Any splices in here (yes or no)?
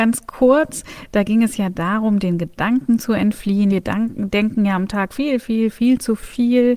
yes